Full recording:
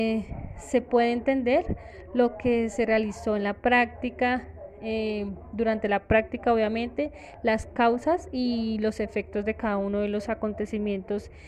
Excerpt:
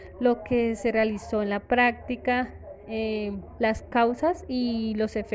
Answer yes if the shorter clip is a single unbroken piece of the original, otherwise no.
no